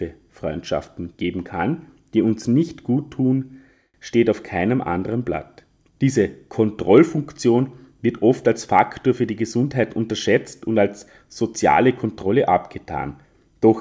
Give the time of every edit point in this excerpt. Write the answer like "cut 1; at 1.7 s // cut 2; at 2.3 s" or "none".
cut 1; at 5.9 s